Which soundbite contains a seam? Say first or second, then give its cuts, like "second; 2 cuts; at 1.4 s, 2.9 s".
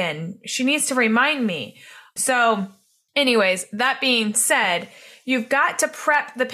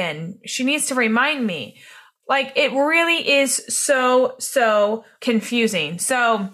first; 1 cut; at 2.2 s